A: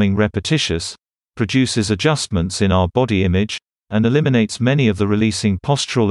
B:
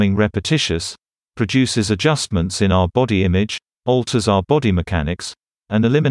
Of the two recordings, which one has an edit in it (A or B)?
A